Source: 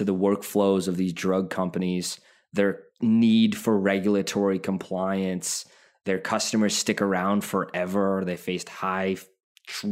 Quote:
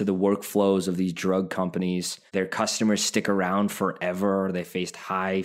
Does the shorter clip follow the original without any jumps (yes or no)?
no